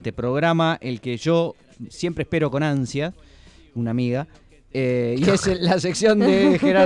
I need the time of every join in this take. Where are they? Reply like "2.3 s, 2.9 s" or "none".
1.9 s

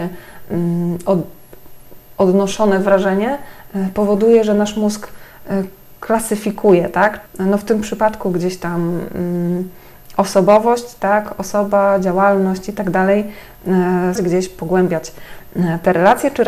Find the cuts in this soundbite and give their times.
7.3 s, 14.2 s

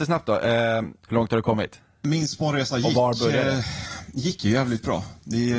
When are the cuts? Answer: 1.0 s

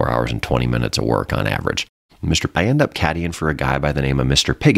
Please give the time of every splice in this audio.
2.5 s

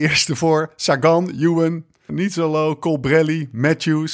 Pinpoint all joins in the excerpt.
2.1 s

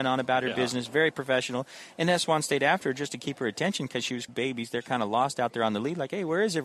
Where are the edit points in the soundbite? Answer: 4.3 s

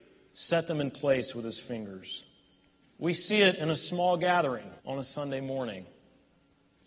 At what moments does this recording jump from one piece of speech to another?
2.8 s, 4.8 s

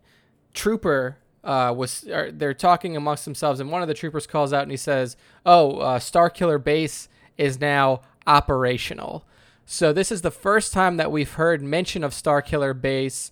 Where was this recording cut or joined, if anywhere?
none

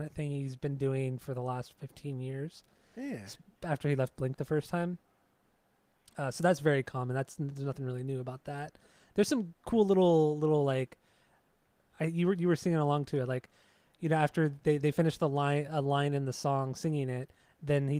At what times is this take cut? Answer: none

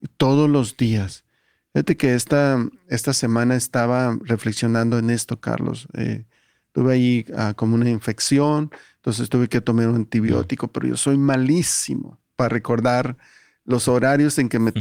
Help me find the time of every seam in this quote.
none

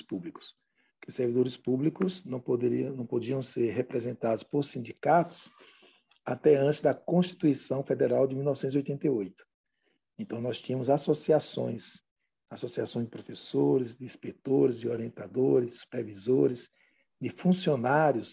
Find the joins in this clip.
none

